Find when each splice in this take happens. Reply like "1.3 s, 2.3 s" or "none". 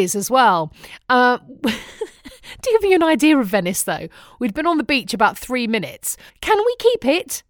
6.3 s